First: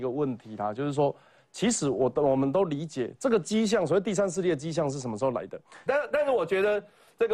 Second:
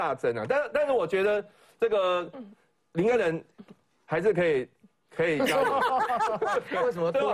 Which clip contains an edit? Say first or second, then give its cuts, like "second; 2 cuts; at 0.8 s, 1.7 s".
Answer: first; 1 cut; at 5.9 s